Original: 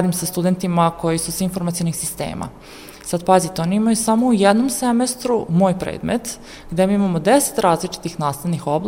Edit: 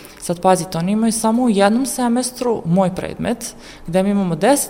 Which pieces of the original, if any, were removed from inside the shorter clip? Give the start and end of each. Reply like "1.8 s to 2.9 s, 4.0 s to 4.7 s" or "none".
none